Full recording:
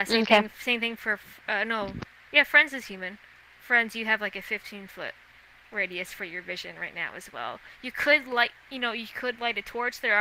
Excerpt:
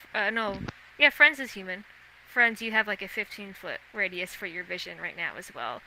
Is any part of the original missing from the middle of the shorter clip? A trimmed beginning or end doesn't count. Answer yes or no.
yes